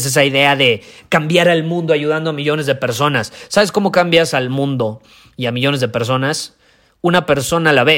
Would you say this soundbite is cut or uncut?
uncut